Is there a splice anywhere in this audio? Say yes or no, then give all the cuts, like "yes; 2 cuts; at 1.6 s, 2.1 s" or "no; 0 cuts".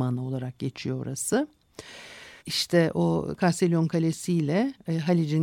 yes; 1 cut; at 2.4 s